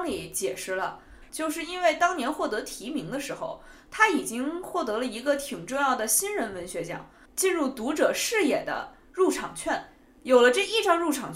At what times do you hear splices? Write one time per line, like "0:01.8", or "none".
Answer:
0:01.3
0:07.2